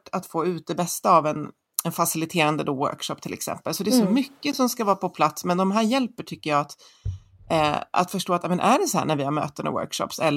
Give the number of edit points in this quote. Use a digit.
0